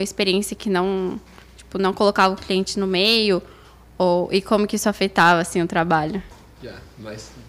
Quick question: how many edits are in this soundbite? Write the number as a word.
zero